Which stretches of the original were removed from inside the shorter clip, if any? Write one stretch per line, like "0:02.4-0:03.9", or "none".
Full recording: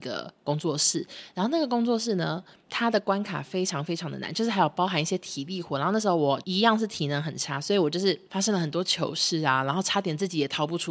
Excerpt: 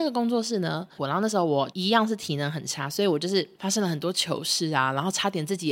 0:02.5-0:05.7